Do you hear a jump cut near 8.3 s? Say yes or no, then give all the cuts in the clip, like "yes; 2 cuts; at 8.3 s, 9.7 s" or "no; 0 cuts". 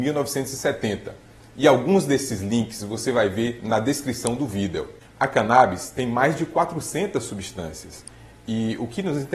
no; 1 cut; at 5.1 s